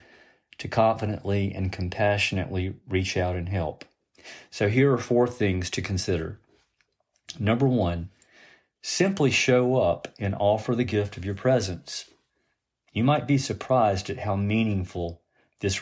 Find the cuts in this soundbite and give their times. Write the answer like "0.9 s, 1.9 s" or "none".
none